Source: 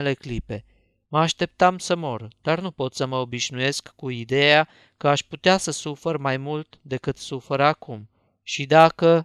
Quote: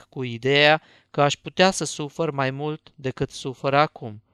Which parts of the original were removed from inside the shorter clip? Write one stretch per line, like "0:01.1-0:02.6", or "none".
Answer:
none